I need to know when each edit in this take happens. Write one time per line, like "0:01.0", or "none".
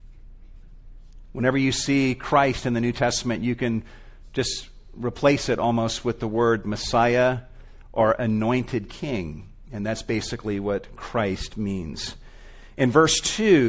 none